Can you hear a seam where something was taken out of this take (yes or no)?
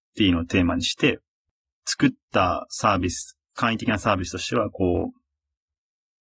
no